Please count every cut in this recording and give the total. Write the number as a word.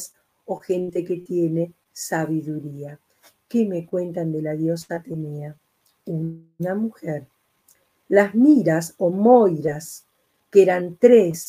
zero